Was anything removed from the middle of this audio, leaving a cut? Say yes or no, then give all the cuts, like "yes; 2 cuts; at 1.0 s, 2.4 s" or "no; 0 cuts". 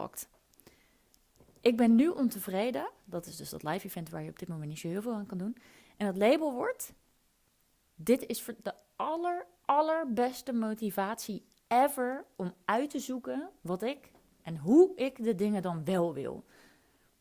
no; 0 cuts